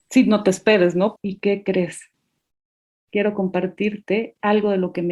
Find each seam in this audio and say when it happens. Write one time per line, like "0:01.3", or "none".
0:01.2